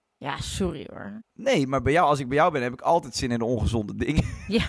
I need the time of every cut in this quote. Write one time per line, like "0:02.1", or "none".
0:01.3